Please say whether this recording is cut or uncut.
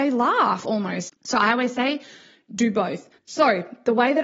cut